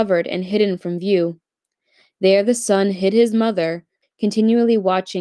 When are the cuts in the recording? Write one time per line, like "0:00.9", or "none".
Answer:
0:04.0

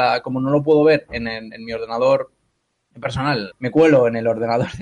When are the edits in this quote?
0:03.5

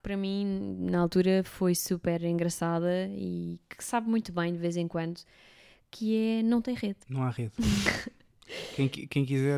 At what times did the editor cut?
0:07.0

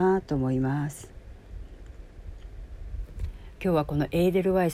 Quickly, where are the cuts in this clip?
none

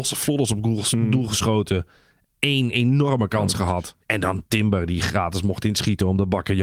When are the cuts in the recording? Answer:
0:04.0

